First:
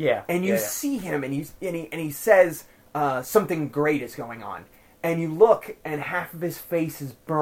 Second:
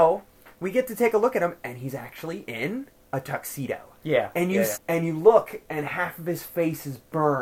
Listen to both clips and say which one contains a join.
second; 1 cut; at 4.7 s

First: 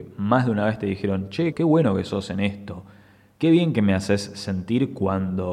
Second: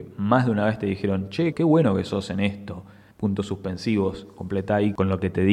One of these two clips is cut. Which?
second; 1 cut; at 3.1 s

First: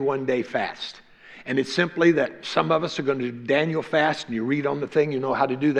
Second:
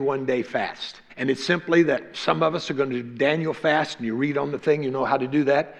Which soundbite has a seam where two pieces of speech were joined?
second; 1 cut; at 1.1 s

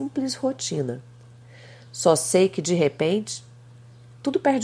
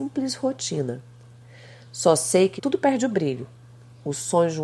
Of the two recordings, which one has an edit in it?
second; 1 cut; at 2.6 s

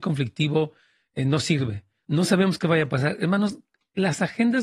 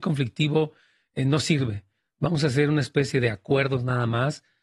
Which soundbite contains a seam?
first; 1 cut; at 2.0 s

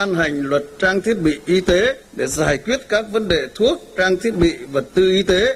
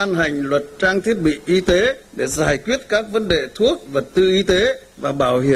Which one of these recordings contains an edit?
second; 1 cut; at 3.9 s

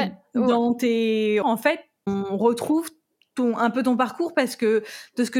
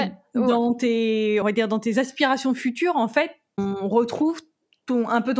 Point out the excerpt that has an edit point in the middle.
first; 1 cut; at 1.4 s

